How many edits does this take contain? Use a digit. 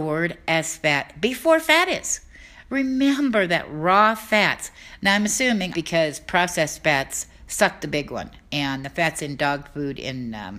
1